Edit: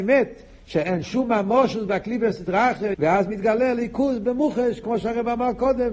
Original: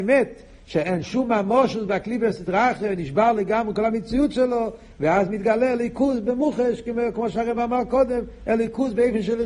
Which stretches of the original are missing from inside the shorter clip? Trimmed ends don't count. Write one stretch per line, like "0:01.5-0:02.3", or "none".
0:02.9-0:04.9
0:06.8-0:07.1